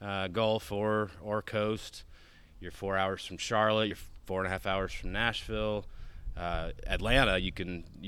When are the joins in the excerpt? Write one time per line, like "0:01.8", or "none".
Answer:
none